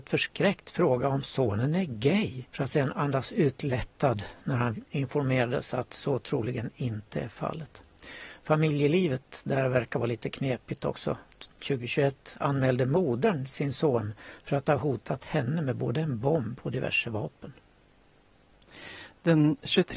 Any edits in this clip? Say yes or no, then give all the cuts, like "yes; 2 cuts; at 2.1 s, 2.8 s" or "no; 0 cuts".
yes; 1 cut; at 2.5 s